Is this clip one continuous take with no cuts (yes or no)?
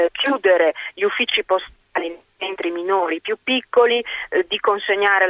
yes